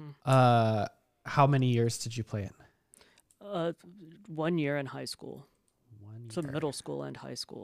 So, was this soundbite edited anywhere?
no; 0 cuts

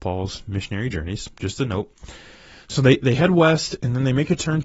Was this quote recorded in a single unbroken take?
yes; 0 cuts

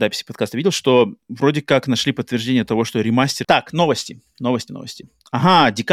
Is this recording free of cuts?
no; 2 cuts; at 3.4 s, 4.7 s

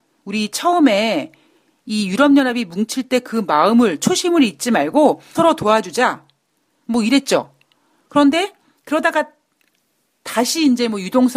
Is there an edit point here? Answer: yes; 1 cut; at 5.3 s

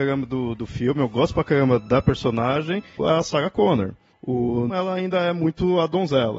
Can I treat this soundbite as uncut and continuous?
no; 1 cut; at 4.7 s

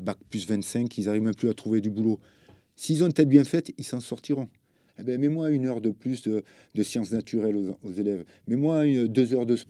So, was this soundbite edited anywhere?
yes; 1 cut; at 4.9 s

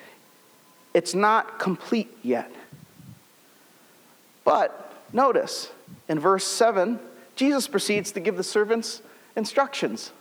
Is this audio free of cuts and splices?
yes; 0 cuts

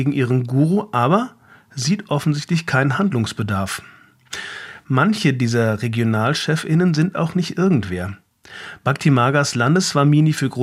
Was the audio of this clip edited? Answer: no; 0 cuts

